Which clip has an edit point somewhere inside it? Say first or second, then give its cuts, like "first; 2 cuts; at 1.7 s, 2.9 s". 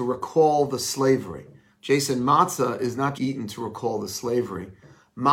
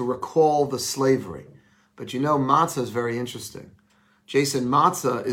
first; 2 cuts; at 1.7 s, 3.1 s